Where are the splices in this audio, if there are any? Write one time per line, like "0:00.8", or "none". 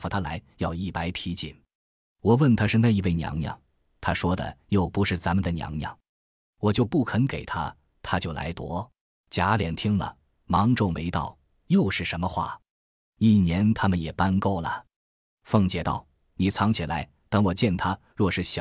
0:09.2